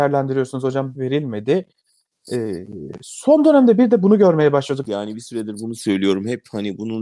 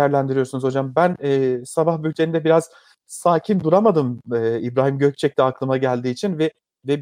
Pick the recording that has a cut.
first; 2 cuts; at 0.9 s, 4.8 s

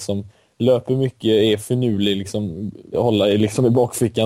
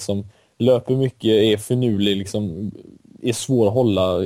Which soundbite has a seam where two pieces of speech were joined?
first; 1 cut; at 2.9 s

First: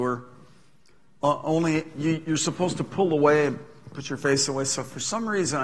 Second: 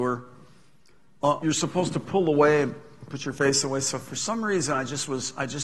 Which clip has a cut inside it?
second; 1 cut; at 1.4 s

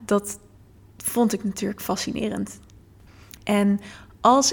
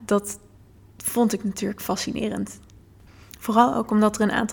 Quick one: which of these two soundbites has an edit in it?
first; 1 cut; at 3.4 s

